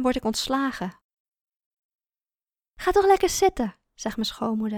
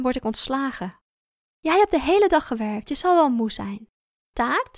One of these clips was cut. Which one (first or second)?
second